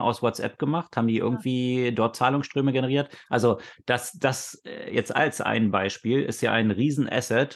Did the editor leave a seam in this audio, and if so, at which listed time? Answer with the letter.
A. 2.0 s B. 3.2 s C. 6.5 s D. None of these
D